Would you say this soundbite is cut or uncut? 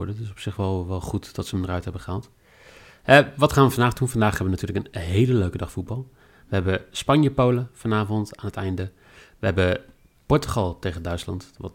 uncut